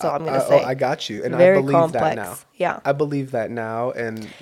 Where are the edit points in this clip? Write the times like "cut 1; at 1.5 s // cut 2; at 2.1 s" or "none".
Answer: none